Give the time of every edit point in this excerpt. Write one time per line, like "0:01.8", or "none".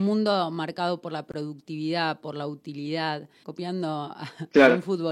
0:03.4